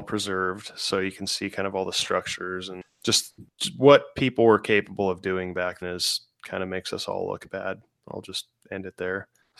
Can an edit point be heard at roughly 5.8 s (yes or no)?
yes